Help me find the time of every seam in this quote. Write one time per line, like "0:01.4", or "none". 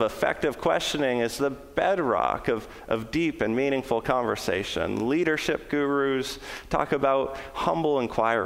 none